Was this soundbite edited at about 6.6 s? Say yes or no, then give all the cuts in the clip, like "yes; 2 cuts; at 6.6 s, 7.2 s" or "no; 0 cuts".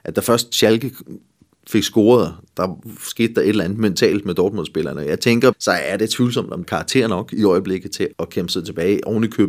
yes; 3 cuts; at 5.5 s, 6.6 s, 8.1 s